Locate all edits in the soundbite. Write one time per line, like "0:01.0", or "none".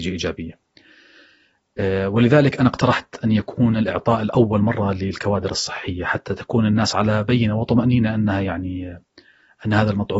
none